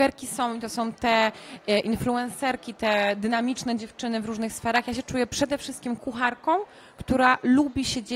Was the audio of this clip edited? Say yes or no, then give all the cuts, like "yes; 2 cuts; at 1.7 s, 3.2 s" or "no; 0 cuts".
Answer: no; 0 cuts